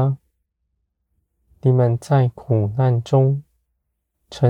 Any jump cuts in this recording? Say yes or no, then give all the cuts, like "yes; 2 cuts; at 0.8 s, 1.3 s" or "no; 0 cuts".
no; 0 cuts